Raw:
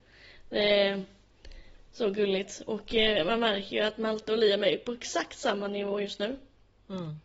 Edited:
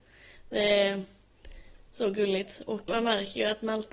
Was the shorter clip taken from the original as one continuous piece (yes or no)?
no